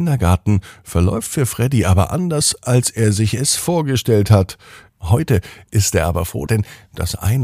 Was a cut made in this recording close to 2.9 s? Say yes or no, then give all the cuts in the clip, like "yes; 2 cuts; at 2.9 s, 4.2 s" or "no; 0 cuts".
no; 2 cuts; at 4.9 s, 6.5 s